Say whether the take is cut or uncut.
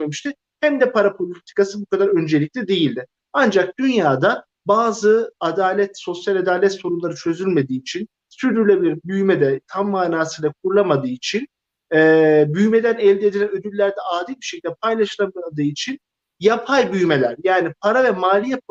uncut